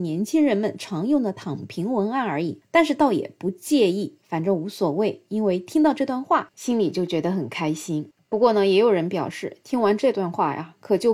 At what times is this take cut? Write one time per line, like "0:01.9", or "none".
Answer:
none